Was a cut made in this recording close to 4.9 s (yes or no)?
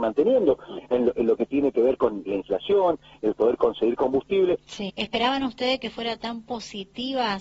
yes